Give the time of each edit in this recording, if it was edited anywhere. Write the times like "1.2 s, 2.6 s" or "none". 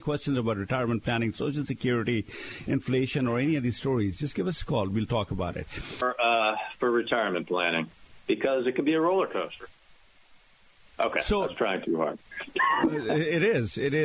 6.0 s